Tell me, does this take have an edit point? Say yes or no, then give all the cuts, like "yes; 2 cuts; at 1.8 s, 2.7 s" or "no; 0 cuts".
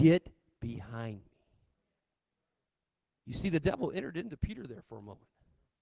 no; 0 cuts